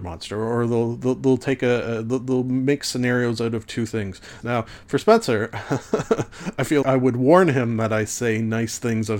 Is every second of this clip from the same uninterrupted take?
no; 2 cuts; at 4.4 s, 6.8 s

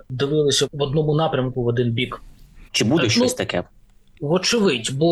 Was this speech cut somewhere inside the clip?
yes; 1 cut; at 2.7 s

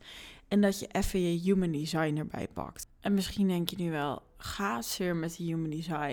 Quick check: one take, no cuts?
yes; 0 cuts

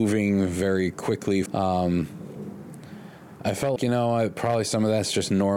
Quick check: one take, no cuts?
no; 2 cuts; at 1.5 s, 3.8 s

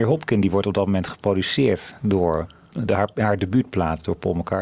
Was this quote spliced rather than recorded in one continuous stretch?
no; 0 cuts

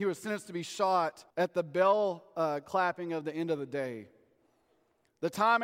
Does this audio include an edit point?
yes; 1 cut; at 1.3 s

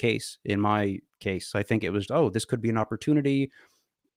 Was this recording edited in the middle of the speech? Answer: yes; 1 cut; at 2.1 s

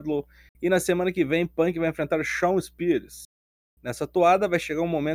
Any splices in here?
no; 0 cuts

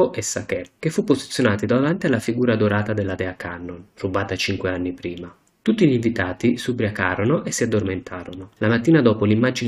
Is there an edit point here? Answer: no; 0 cuts

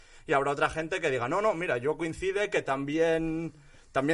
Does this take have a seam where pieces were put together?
no; 0 cuts

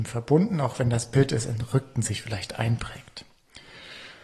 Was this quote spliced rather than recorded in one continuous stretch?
no; 0 cuts

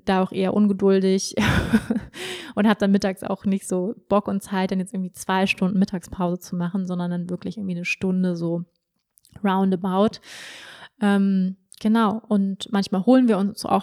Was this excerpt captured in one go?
yes; 0 cuts

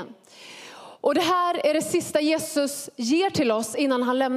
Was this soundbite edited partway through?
no; 0 cuts

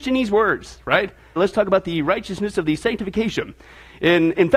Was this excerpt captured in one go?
no; 1 cut; at 1.4 s

